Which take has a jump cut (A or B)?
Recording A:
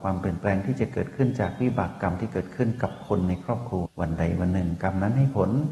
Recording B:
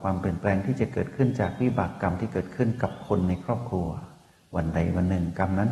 A